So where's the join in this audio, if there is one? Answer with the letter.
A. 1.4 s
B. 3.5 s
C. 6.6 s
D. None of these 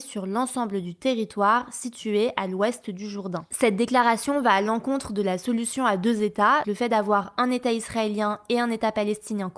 C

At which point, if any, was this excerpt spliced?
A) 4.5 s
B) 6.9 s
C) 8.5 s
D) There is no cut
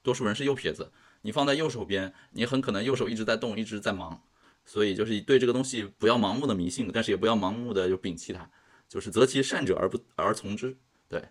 A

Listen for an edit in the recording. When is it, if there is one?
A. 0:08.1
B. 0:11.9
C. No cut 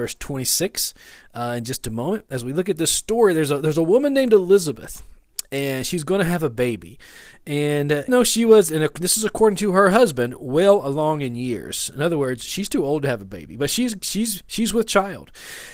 A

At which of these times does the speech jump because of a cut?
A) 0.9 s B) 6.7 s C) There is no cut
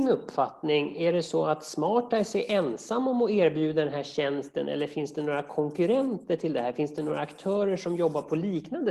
C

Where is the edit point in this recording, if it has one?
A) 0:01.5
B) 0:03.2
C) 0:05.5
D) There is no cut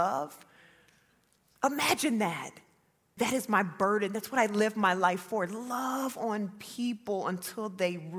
B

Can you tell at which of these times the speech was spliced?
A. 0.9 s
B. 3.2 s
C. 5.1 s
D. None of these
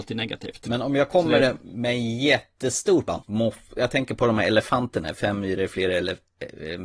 B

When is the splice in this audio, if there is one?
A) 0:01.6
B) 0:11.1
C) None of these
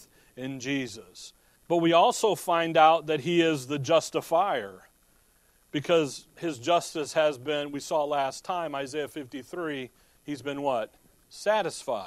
A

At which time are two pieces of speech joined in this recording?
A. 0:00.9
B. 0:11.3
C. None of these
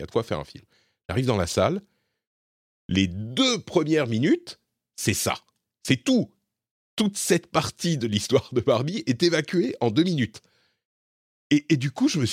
C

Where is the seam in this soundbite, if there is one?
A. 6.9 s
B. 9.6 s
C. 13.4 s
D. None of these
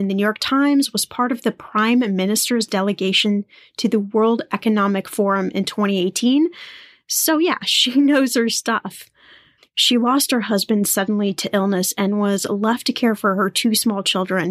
B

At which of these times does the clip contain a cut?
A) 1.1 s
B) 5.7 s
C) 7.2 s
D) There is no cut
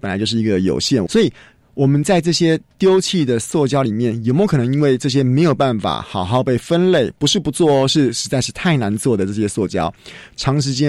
A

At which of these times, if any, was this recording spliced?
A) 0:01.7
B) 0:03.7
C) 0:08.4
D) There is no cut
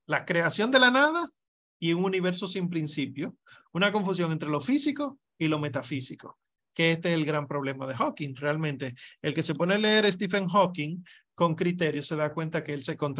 D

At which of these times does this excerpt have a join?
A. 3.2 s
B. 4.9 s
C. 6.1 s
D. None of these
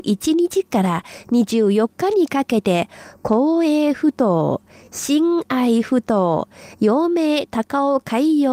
D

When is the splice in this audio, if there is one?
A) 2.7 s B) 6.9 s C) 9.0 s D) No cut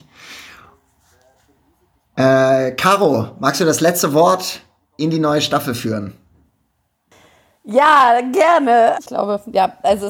C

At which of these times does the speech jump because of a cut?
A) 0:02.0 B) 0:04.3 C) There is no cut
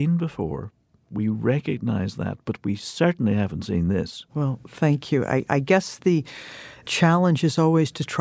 B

